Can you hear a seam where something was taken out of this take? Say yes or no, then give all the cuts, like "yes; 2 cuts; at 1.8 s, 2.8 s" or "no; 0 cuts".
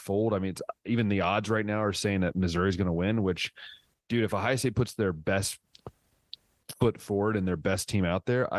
no; 0 cuts